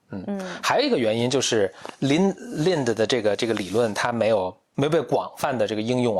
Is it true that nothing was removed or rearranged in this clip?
yes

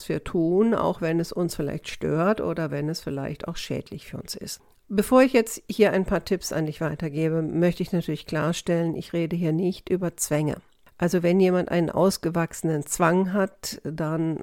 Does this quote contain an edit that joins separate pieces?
no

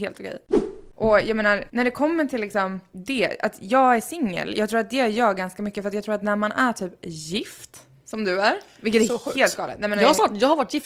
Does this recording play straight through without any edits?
yes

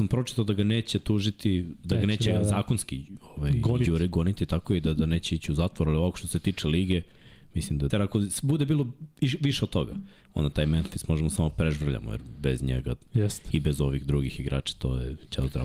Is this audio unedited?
no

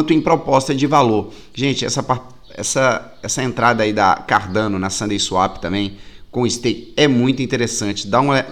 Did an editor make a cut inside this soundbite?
no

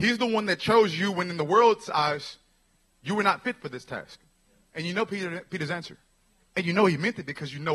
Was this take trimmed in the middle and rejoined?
yes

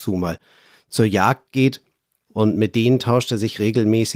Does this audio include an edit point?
yes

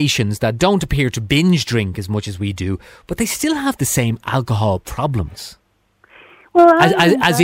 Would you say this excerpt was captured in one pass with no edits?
yes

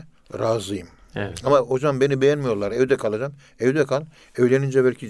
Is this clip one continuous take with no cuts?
yes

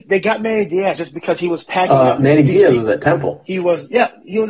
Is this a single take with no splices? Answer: yes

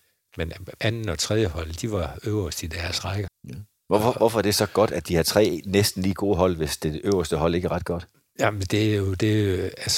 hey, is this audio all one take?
no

